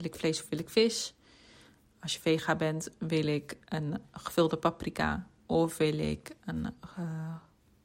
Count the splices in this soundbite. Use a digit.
0